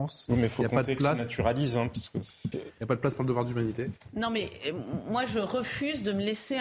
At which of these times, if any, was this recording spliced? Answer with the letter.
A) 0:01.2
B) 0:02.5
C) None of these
B